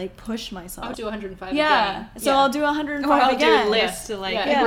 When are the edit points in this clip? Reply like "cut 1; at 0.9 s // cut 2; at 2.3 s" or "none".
cut 1; at 0.9 s